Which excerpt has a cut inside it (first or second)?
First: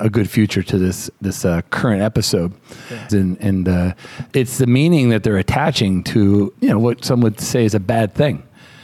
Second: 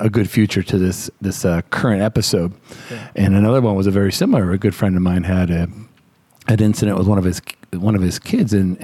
first